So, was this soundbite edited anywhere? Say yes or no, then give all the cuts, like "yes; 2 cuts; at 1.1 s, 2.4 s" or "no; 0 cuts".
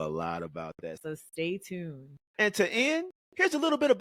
yes; 2 cuts; at 1.0 s, 2.3 s